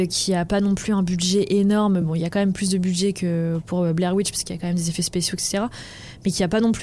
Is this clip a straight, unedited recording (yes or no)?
yes